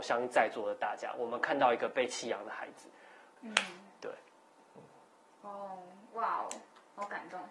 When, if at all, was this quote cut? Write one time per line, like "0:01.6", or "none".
0:03.4